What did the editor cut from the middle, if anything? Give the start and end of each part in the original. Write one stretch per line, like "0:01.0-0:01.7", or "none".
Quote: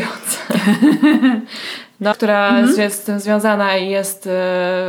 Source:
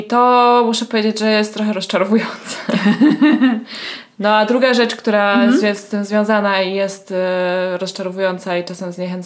0:04.3-0:05.0